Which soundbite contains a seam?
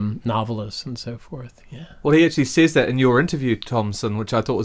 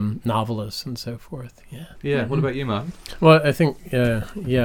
second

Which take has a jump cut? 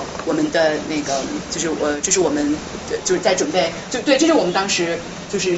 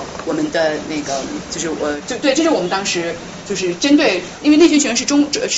second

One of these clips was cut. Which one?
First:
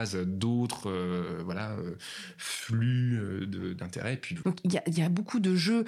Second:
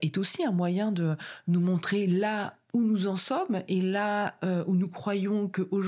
first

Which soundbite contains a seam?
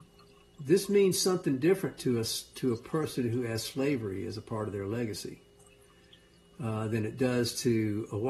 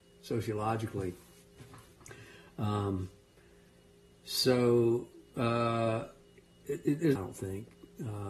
second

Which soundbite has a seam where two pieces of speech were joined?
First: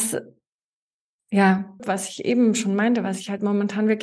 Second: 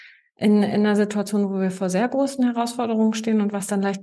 first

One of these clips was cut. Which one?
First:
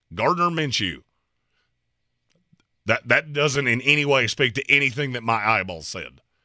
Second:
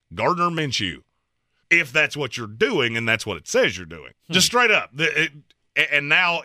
second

